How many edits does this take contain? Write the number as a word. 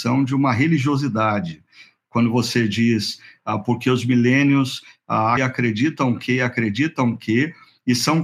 one